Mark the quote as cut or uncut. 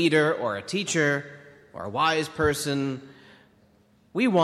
uncut